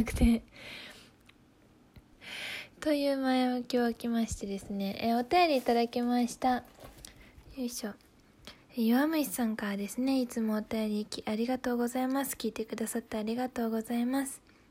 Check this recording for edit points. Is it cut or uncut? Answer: cut